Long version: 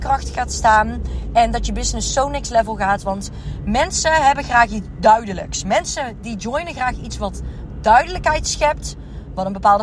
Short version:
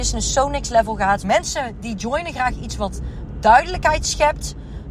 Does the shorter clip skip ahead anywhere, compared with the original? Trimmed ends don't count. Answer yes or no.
yes